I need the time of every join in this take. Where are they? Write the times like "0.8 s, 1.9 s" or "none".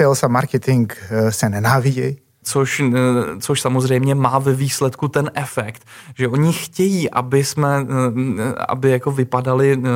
2.4 s